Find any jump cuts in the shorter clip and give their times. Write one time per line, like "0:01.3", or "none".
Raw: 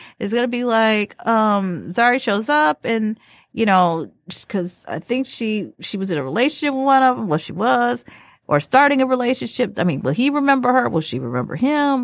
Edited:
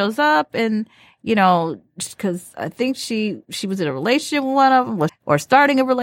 0:05.1